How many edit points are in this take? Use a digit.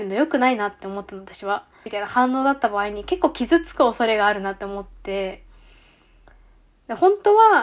1